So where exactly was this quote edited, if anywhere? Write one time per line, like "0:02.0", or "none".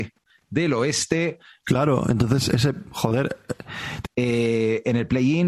0:01.6
0:04.0

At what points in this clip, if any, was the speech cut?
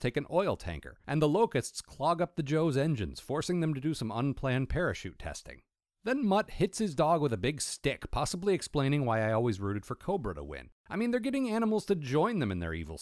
none

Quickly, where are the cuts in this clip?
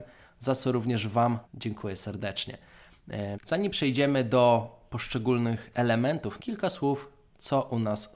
0:01.4
0:03.3
0:06.4

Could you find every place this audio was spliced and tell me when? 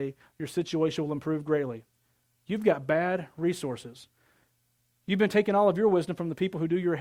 none

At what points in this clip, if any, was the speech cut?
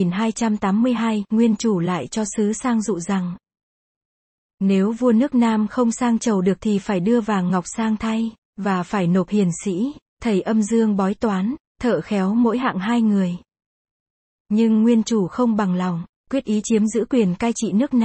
0:14.4

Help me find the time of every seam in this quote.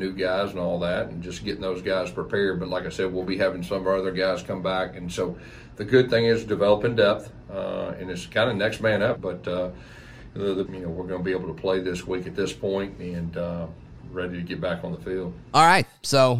0:09.1
0:10.6

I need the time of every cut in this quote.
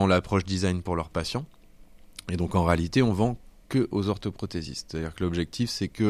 none

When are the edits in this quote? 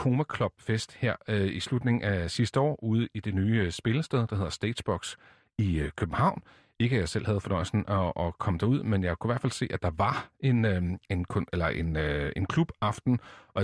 none

